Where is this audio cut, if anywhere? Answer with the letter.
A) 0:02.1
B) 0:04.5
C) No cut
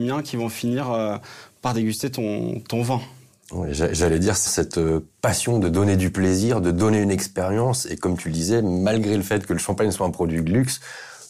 B